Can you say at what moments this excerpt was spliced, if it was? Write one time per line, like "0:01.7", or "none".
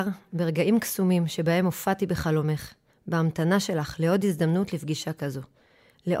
0:02.9